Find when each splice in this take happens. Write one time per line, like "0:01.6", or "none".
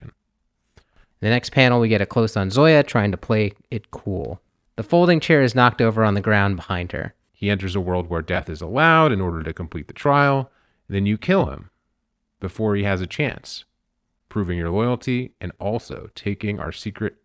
0:04.7
0:07.3